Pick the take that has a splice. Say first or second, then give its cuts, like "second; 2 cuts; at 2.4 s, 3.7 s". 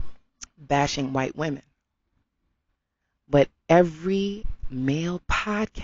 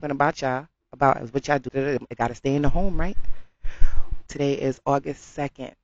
second; 2 cuts; at 1.7 s, 4.3 s